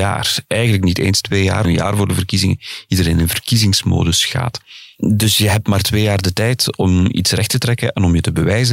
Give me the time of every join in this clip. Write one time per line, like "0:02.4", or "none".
0:01.6